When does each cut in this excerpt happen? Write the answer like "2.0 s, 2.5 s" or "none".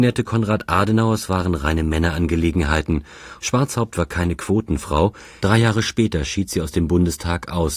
3.4 s, 5.4 s